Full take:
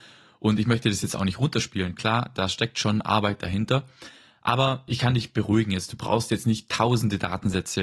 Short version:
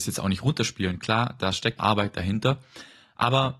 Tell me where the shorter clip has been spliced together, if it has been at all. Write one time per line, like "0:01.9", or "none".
0:01.8